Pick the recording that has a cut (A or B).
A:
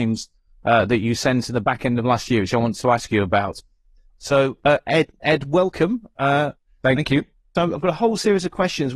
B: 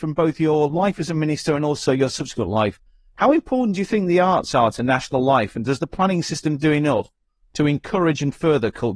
A